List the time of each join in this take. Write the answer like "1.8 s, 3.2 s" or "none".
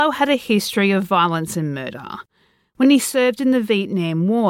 none